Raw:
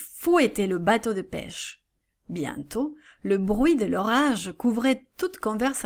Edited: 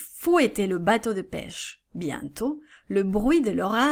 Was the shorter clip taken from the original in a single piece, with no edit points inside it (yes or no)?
no